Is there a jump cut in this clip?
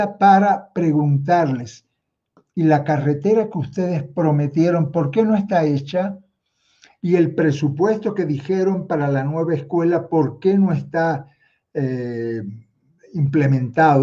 no; 0 cuts

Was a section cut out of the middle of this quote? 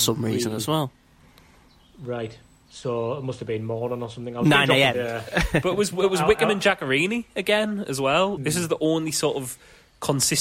yes; 2 cuts; at 4.9 s, 8.4 s

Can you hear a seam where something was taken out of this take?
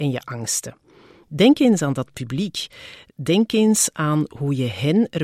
no; 0 cuts

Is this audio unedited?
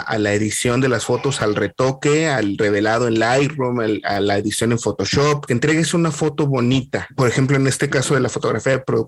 no; 1 cut; at 5.5 s

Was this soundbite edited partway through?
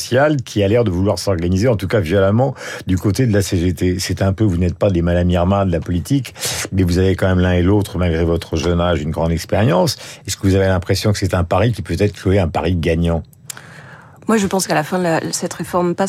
no; 0 cuts

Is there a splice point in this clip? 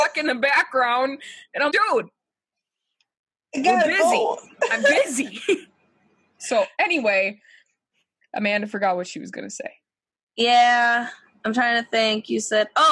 yes; 1 cut; at 1.7 s

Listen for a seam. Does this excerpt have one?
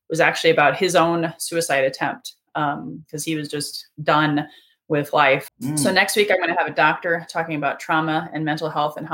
yes; 1 cut; at 5.5 s

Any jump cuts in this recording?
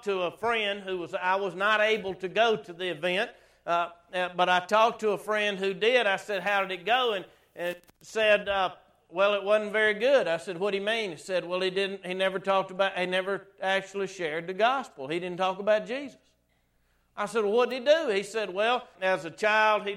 yes; 1 cut; at 18.9 s

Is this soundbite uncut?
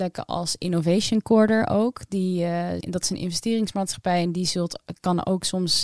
no; 1 cut; at 2.8 s

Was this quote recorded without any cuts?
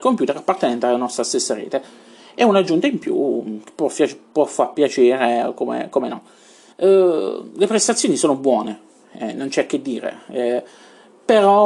no; 1 cut; at 6.7 s

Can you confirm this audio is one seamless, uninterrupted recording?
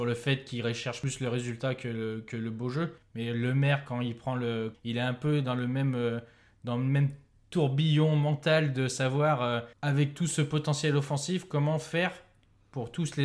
no; 2 cuts; at 4.7 s, 9.7 s

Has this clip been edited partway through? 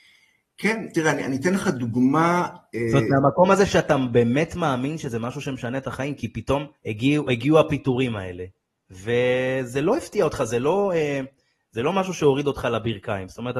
yes; 1 cut; at 6.8 s

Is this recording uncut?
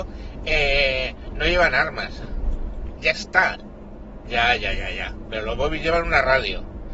no; 2 cuts; at 3.0 s, 4.2 s

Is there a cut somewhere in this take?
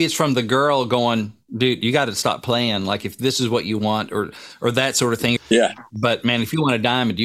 yes; 1 cut; at 5.4 s

